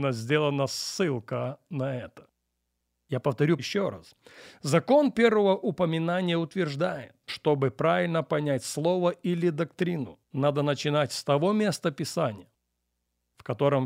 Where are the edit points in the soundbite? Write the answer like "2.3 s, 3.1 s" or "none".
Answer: 3.6 s, 7.3 s, 10.2 s